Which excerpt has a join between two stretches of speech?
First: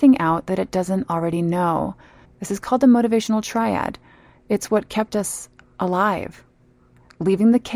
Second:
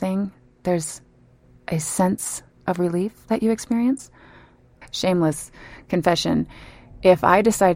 first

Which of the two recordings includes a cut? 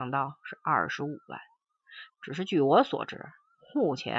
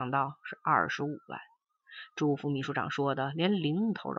first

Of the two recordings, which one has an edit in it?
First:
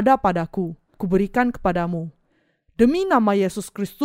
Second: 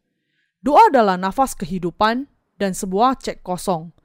first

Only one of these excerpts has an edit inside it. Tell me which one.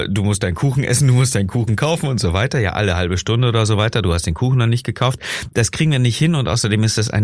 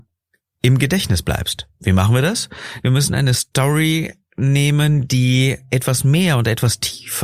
second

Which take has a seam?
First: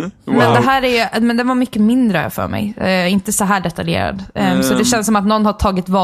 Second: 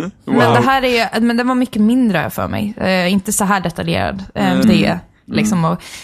second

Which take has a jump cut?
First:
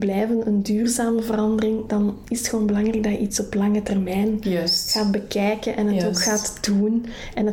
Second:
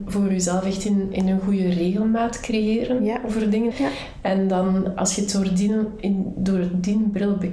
second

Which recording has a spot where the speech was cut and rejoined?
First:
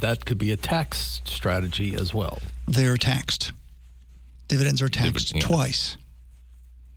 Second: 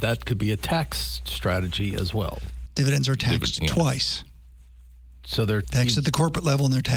second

